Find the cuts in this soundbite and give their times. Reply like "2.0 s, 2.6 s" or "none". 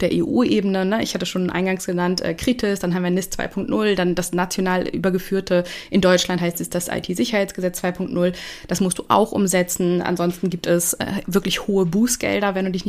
none